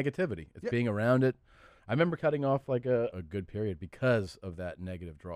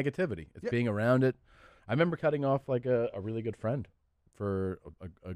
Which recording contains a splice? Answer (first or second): first